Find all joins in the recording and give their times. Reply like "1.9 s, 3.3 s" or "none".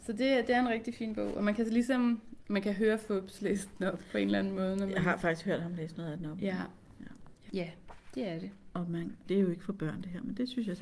7.5 s, 9.2 s